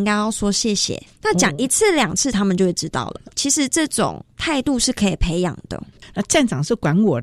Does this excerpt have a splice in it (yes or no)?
yes